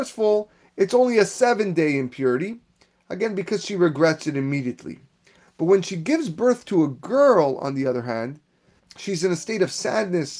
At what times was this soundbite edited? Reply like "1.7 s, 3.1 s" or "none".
8.8 s

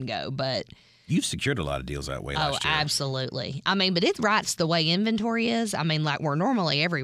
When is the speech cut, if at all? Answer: 4.4 s

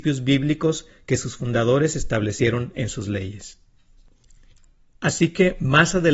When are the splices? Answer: none

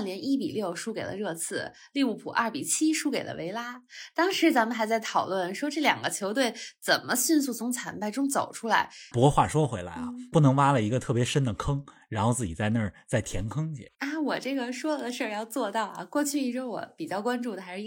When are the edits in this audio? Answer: 9.1 s, 10.3 s, 13.9 s

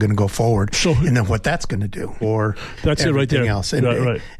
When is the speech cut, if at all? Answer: 2.2 s

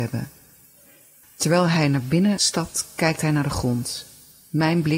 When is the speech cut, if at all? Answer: 1.2 s

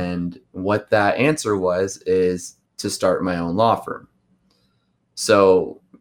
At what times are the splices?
2.7 s

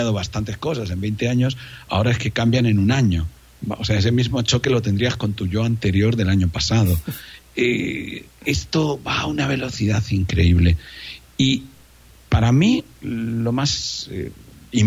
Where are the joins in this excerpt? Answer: none

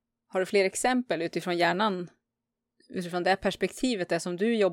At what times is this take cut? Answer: none

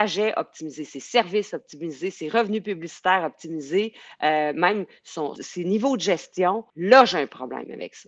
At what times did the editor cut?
5.4 s, 6.7 s

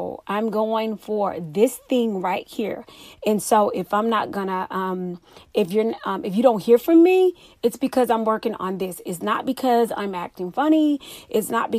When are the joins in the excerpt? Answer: none

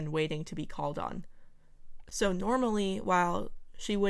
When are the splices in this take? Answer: 2.0 s

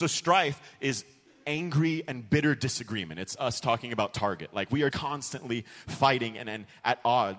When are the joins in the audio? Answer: 4.9 s

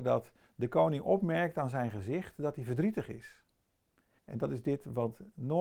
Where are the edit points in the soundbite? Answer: 4.2 s

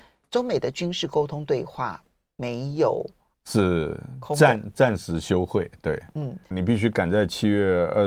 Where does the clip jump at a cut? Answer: 3.3 s, 6.5 s

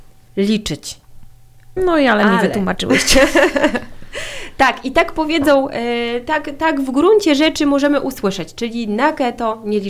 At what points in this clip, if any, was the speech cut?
1.8 s

